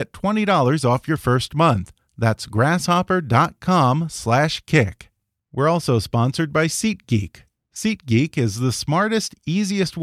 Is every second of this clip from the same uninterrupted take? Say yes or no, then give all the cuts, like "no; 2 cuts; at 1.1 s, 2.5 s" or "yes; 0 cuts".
yes; 0 cuts